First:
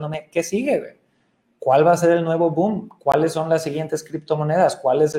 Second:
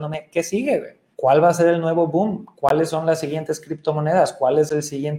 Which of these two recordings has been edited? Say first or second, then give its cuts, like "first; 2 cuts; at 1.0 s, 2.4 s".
second; 1 cut; at 1.1 s